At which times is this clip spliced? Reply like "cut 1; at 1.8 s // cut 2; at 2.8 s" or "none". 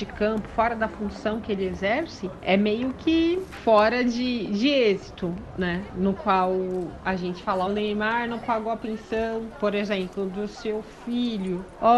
cut 1; at 7.7 s